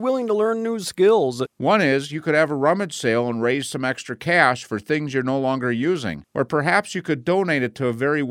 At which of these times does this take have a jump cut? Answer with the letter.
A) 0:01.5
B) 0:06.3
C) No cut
A